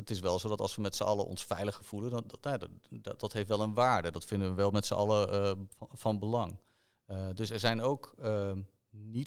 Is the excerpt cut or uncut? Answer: uncut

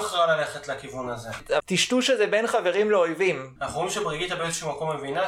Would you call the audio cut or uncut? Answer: cut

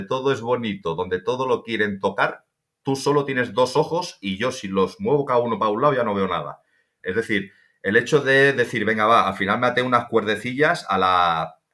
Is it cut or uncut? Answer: cut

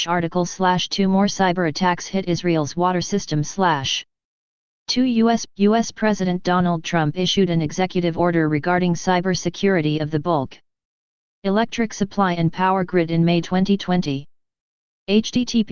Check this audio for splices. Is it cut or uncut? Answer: cut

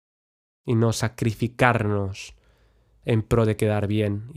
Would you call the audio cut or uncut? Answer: uncut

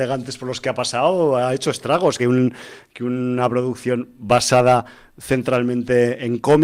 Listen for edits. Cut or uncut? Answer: cut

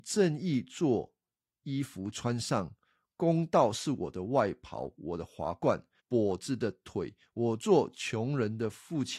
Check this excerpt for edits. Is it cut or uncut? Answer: cut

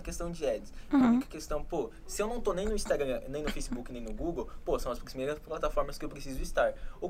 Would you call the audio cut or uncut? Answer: uncut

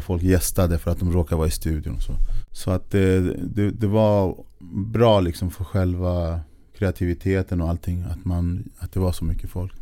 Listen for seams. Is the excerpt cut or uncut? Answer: uncut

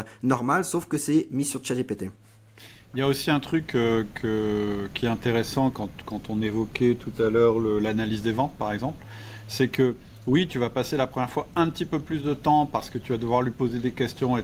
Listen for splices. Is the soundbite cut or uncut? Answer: uncut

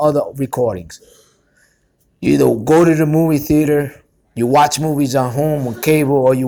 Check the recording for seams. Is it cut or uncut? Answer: uncut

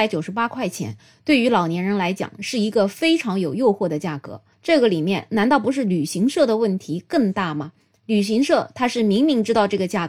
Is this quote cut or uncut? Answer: cut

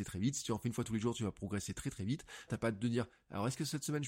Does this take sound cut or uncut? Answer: cut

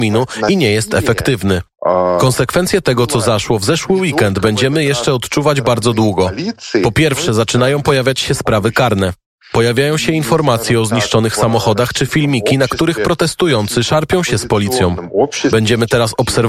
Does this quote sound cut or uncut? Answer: uncut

